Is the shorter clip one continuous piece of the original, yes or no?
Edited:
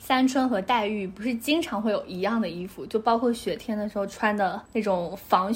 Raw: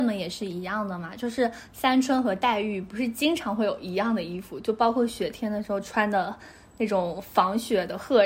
no